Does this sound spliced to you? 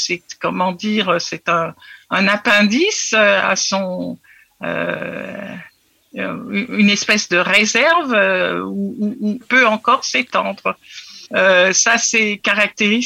yes; 2 cuts; at 9.4 s, 11.3 s

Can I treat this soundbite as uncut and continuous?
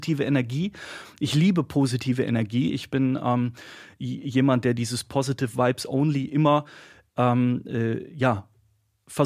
yes; 0 cuts

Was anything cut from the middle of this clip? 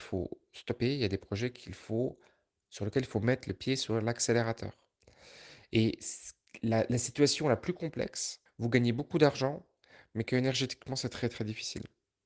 yes; 1 cut; at 8.5 s

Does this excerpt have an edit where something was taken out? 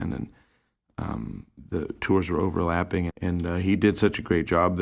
yes; 1 cut; at 3.1 s

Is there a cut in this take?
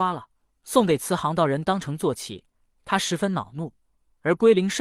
no; 0 cuts

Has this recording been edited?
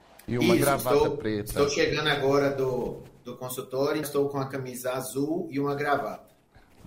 yes; 1 cut; at 4.0 s

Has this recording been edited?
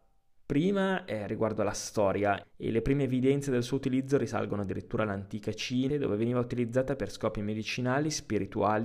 yes; 2 cuts; at 2.4 s, 5.9 s

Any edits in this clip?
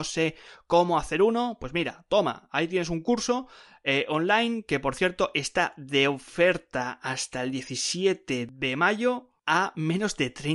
no; 0 cuts

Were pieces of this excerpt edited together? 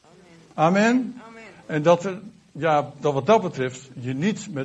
no; 0 cuts

